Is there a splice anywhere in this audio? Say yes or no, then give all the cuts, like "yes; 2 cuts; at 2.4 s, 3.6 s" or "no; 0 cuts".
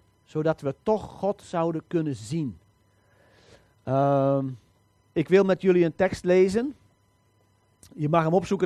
yes; 1 cut; at 5.1 s